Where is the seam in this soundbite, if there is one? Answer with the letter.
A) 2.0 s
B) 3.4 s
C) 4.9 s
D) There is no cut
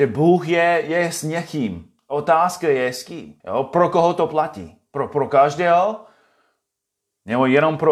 B